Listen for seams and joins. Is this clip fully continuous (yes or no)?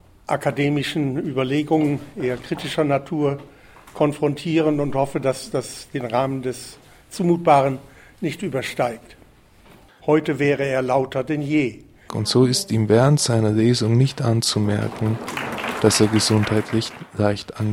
no